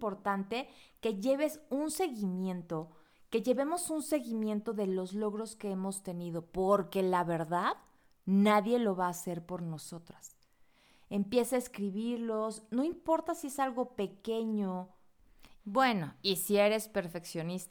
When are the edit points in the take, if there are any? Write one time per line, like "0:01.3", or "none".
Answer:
0:15.6